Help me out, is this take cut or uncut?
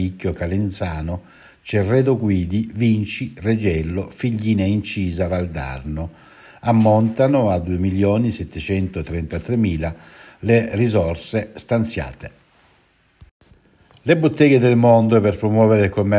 uncut